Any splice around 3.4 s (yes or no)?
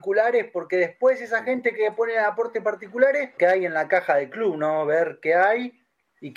yes